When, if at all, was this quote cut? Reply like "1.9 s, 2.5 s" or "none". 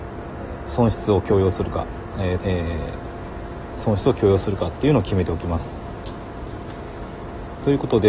2.4 s